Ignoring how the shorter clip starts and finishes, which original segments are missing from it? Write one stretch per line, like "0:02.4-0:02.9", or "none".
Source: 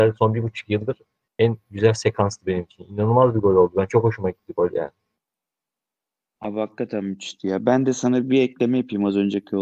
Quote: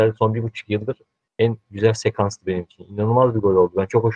none